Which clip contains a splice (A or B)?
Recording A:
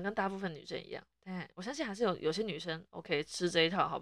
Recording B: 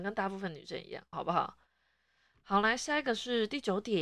B